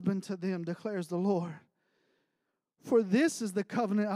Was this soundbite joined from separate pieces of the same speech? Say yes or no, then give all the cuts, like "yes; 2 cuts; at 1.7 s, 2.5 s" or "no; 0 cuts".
no; 0 cuts